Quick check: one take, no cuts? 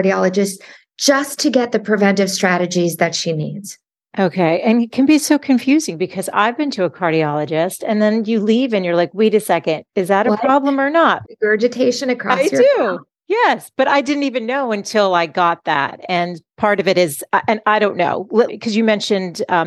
no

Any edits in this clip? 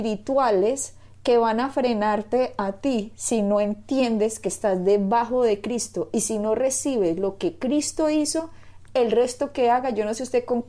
no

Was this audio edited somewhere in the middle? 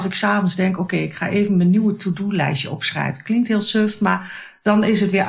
no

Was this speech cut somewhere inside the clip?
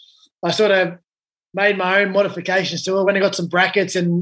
no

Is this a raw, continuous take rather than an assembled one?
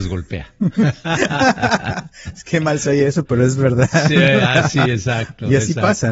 yes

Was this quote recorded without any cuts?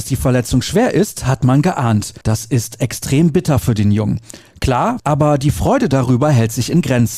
no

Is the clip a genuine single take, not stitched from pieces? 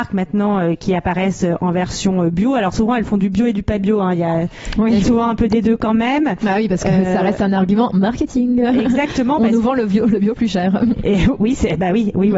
yes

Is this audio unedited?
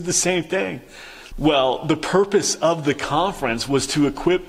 no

